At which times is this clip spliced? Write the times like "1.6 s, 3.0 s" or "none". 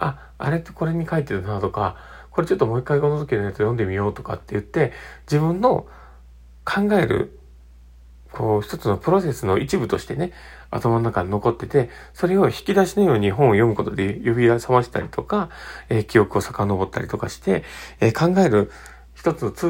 none